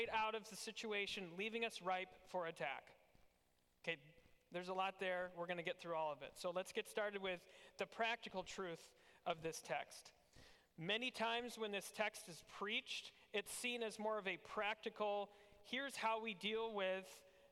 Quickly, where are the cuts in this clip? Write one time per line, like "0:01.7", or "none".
none

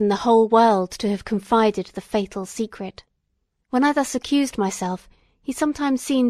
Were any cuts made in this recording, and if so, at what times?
0:03.6

